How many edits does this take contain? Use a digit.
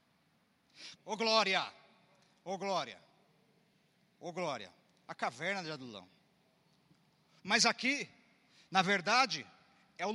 2